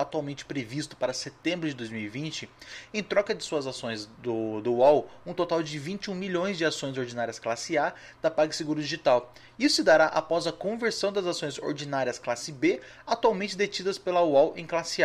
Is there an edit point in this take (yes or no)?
no